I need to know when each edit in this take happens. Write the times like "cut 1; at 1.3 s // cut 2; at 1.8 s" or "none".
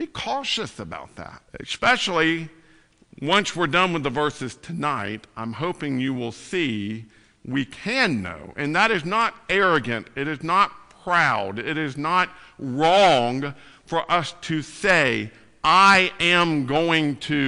cut 1; at 1.5 s